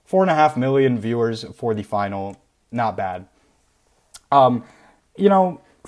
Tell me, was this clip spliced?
no; 0 cuts

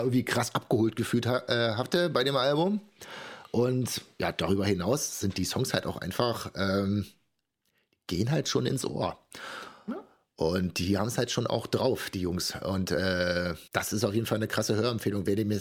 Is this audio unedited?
no; 1 cut; at 13.7 s

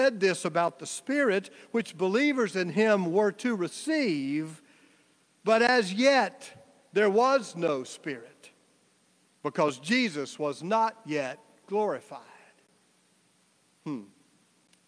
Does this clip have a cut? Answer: no; 0 cuts

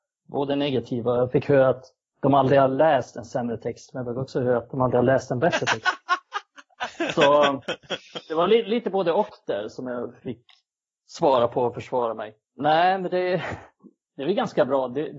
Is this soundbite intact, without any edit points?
no; 1 cut; at 12.4 s

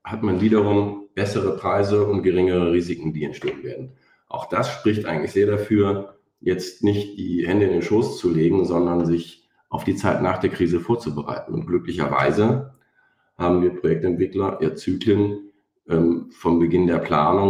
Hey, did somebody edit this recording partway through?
no; 0 cuts

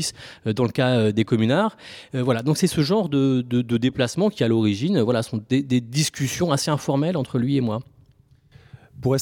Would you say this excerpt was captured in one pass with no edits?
yes; 0 cuts

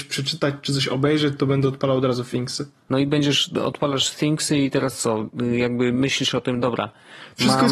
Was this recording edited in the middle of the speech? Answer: no; 0 cuts

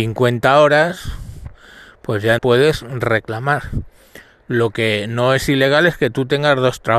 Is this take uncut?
no; 1 cut; at 2.4 s

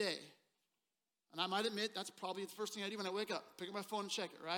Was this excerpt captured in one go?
yes; 0 cuts

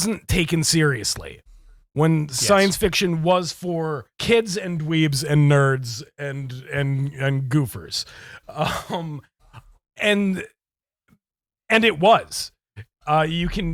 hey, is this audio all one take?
no; 1 cut; at 4.1 s

